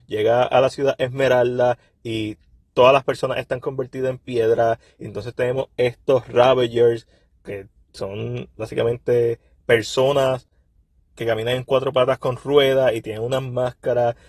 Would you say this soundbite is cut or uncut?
uncut